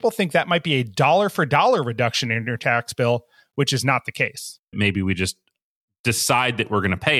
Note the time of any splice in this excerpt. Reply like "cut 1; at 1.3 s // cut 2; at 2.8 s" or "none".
cut 1; at 4.7 s